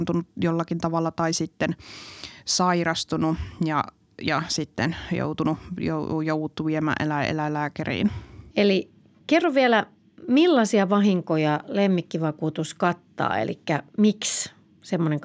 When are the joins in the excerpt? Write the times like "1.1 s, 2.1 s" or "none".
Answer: 8.5 s